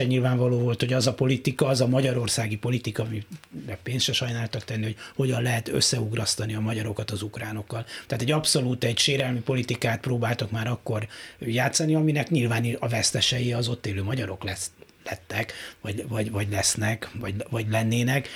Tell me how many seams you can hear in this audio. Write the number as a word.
zero